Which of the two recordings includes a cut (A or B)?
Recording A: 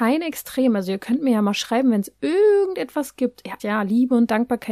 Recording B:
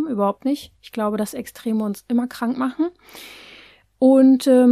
A